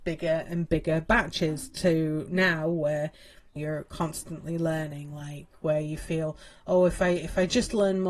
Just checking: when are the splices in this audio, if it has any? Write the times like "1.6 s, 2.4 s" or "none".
3.6 s

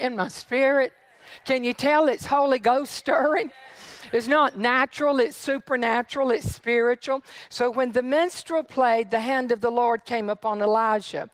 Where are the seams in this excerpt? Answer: none

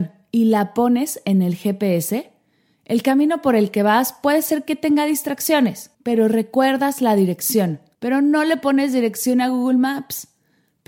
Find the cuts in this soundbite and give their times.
5.9 s, 7.9 s

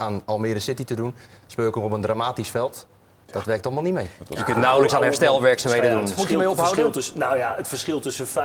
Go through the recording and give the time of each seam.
6.2 s

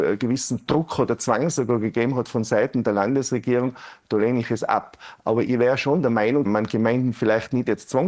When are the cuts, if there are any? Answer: 6.5 s

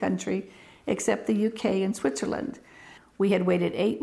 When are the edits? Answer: 3.0 s

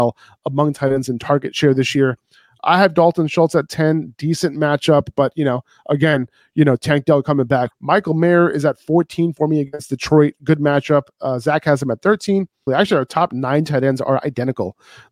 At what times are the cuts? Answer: 7.7 s, 12.7 s

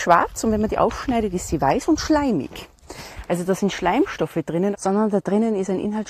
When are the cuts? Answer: 4.7 s

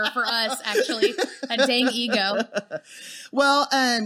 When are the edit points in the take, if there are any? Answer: none

